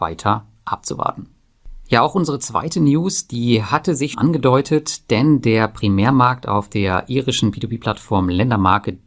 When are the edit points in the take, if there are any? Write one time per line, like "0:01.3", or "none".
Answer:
0:04.1